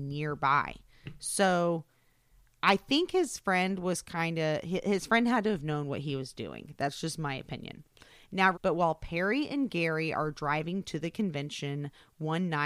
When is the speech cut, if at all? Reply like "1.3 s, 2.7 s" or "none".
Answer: 8.5 s